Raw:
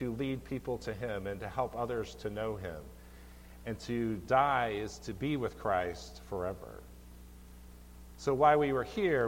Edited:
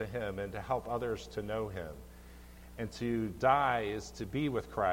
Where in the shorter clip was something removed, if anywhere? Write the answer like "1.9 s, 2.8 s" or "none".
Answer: none